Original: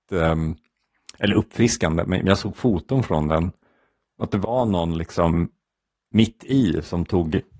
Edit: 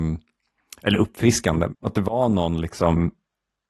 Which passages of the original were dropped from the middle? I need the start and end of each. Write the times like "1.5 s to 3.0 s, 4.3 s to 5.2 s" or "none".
2.1 s to 4.1 s